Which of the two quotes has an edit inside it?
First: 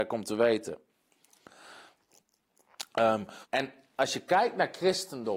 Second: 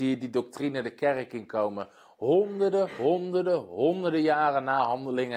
first; 1 cut; at 3.4 s

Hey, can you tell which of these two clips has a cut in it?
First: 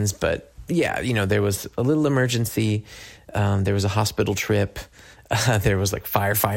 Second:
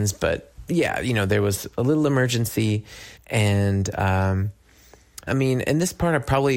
second; 2 cuts; at 3.2 s, 5.3 s

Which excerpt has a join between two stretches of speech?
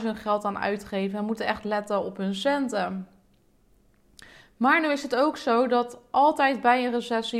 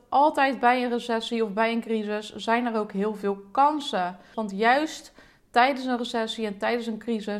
second; 1 cut; at 4.3 s

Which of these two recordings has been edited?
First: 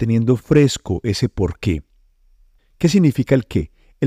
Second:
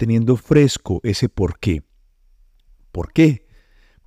first; 1 cut; at 2.6 s

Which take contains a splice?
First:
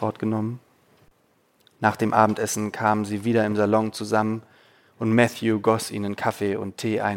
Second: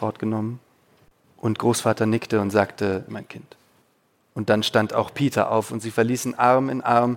second; 2 cuts; at 1.2 s, 3.1 s

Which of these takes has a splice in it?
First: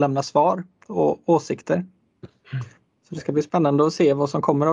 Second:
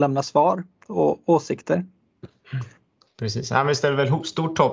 second; 1 cut; at 3.0 s

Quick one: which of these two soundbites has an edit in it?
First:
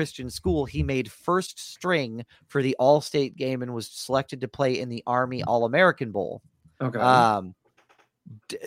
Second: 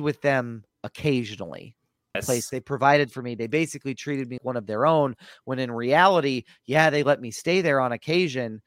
second; 2 cuts; at 2.1 s, 4.4 s

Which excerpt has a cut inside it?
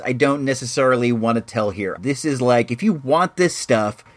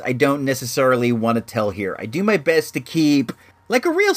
first; 1 cut; at 2.0 s

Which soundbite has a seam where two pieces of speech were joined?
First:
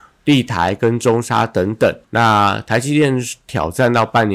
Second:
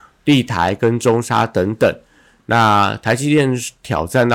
first; 1 cut; at 2.0 s

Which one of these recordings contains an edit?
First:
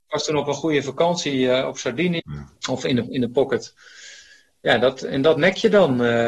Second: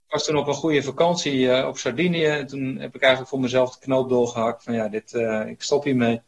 first; 1 cut; at 2.2 s

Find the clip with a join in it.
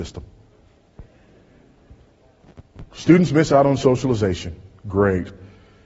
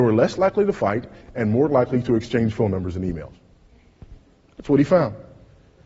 first; 1 cut; at 2.9 s

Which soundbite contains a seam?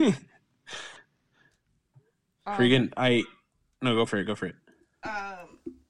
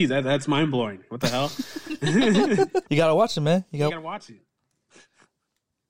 second; 2 cuts; at 2.8 s, 3.9 s

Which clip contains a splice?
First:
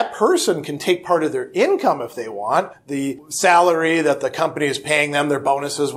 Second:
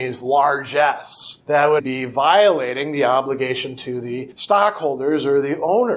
second; 1 cut; at 1.8 s

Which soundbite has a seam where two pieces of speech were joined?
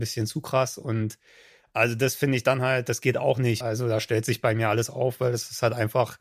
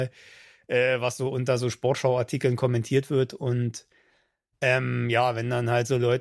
first; 1 cut; at 3.6 s

